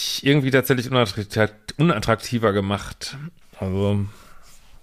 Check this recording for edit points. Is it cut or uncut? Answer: cut